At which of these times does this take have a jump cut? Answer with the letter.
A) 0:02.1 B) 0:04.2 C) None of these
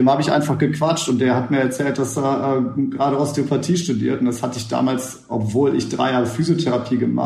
C